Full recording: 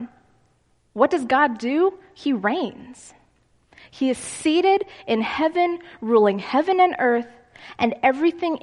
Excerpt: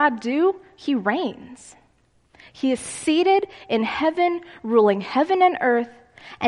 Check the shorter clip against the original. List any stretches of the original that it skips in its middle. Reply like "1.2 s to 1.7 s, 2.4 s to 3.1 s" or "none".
none